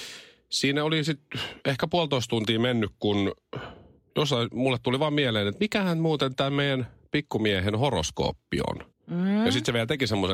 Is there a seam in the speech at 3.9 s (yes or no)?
no